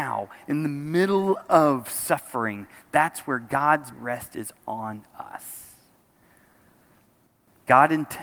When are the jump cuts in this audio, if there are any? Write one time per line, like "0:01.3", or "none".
0:03.9